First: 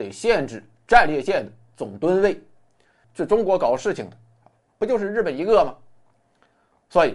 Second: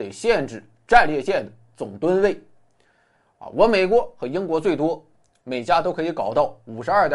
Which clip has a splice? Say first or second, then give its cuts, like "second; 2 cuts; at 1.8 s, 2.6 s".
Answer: first; 1 cut; at 3.0 s